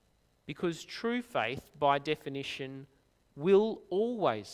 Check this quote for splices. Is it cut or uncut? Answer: uncut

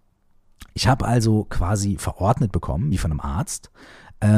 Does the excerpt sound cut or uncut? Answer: uncut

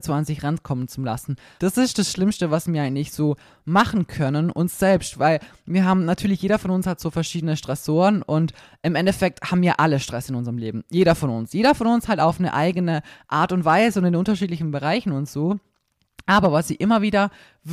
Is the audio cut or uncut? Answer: cut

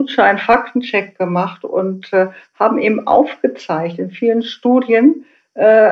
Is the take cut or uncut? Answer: uncut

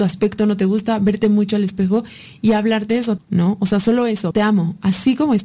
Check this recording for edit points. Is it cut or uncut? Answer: cut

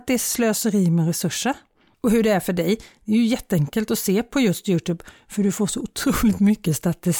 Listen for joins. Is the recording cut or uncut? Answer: uncut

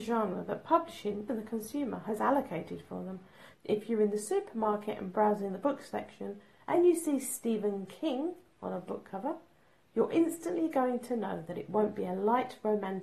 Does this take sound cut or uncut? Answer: cut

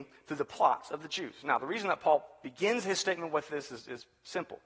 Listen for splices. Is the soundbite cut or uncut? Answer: uncut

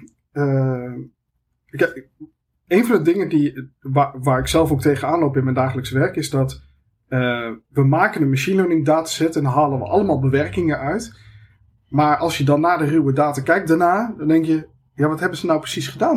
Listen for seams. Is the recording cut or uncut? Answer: uncut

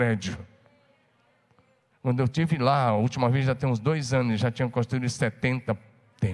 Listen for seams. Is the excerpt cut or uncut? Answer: uncut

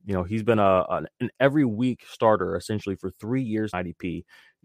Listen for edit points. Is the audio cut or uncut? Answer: cut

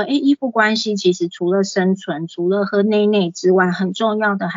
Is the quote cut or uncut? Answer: uncut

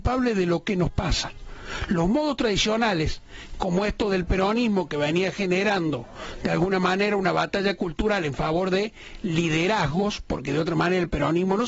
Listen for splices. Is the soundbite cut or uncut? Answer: uncut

